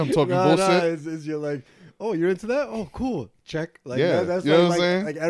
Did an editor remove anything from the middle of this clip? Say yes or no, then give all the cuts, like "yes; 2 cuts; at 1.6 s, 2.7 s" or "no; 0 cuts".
no; 0 cuts